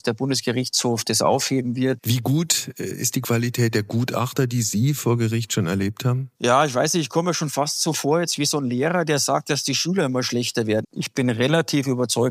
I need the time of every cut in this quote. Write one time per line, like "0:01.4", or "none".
0:02.0
0:06.3
0:10.8